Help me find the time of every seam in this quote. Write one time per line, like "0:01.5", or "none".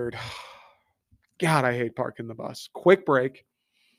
none